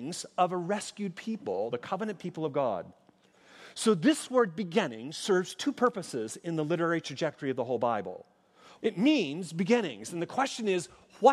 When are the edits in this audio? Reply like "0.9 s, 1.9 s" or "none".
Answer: 1.7 s, 8.8 s